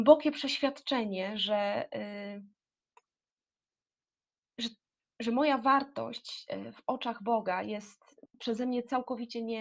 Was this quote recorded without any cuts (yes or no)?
yes